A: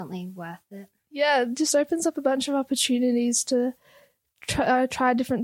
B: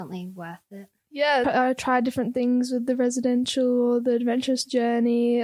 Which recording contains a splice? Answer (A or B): B